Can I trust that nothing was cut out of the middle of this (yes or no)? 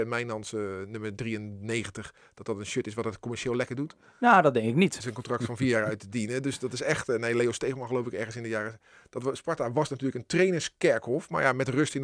no